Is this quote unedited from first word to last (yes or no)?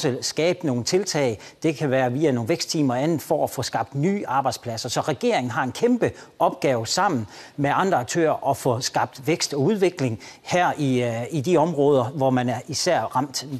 yes